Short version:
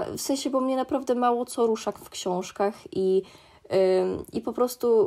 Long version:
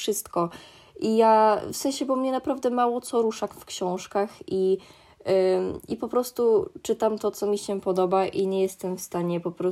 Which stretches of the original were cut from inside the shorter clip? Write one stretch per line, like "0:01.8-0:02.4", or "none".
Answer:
none